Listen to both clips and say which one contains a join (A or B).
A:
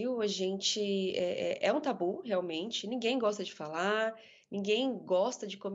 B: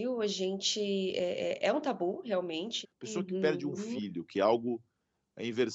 B